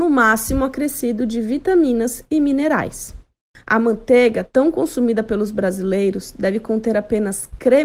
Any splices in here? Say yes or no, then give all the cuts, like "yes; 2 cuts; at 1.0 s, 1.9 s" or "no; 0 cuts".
no; 0 cuts